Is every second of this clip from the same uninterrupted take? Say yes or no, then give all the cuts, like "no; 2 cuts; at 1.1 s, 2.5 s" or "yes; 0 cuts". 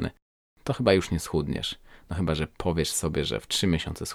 yes; 0 cuts